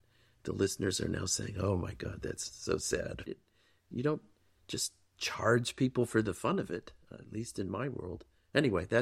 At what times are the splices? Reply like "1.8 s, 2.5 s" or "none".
3.3 s

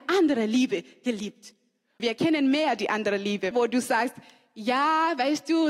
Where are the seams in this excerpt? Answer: 2.0 s, 3.5 s

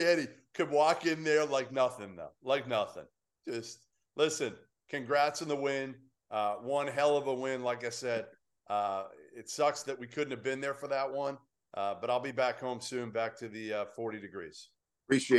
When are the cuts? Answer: none

